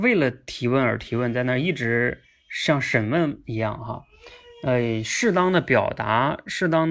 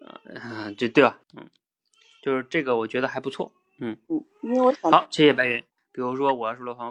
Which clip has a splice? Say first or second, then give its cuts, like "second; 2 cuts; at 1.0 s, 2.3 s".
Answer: second; 2 cuts; at 1.2 s, 5.8 s